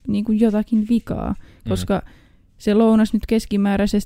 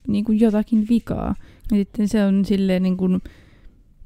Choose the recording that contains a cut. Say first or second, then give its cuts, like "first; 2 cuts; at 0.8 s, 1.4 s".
second; 1 cut; at 1.6 s